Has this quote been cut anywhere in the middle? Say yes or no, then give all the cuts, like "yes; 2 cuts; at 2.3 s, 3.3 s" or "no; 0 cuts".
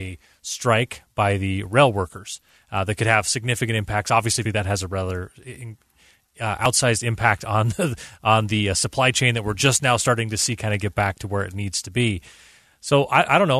yes; 1 cut; at 4.4 s